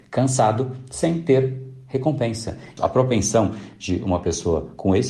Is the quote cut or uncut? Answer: cut